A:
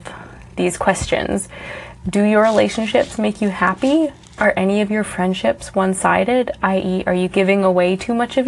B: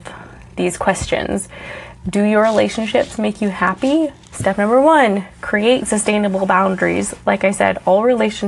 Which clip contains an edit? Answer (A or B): B